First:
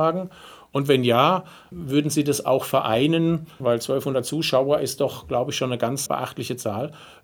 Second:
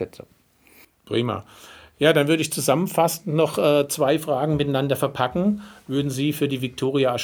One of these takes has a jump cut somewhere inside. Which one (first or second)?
first